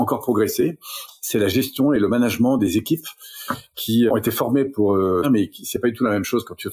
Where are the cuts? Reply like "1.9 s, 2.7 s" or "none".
4.1 s, 5.2 s